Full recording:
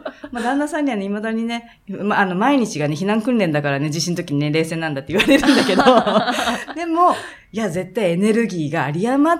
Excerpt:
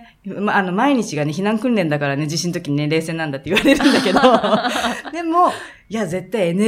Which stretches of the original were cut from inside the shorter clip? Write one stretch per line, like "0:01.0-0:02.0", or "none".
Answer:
none